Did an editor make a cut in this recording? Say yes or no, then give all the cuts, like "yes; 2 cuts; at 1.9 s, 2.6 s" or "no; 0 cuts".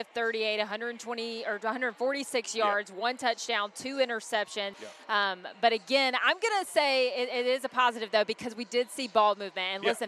yes; 1 cut; at 4.7 s